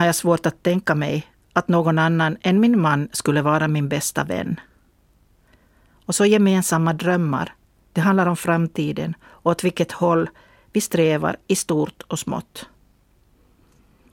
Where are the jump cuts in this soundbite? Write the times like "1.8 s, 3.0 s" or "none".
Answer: none